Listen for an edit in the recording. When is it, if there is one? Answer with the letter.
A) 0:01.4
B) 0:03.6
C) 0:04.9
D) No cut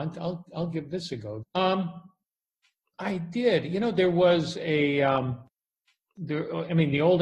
A